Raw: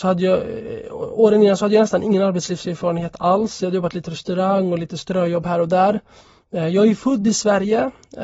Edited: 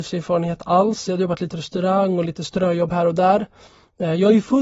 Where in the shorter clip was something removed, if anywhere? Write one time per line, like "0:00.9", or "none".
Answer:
none